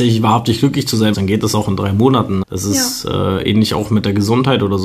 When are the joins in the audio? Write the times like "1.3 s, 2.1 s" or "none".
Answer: 1.1 s, 2.4 s